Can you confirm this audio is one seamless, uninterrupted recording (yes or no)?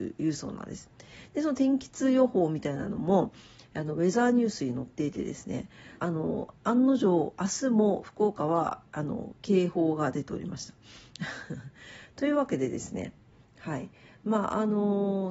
no